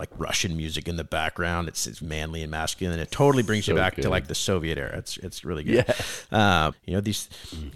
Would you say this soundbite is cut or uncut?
cut